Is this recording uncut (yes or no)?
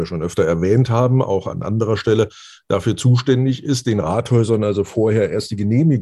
yes